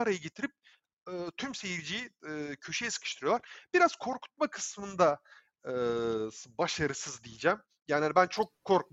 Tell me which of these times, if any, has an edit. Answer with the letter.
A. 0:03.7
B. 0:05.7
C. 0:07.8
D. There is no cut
D